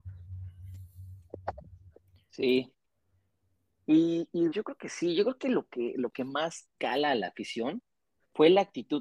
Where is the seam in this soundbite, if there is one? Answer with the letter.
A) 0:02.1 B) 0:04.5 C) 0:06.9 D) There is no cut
B